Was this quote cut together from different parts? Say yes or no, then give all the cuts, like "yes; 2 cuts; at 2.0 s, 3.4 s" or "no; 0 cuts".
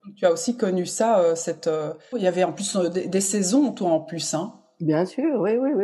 yes; 1 cut; at 2.1 s